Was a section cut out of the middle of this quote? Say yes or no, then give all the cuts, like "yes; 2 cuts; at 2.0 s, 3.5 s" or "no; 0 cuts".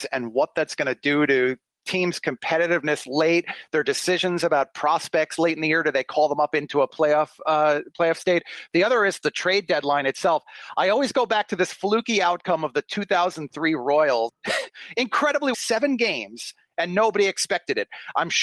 yes; 2 cuts; at 14.3 s, 15.5 s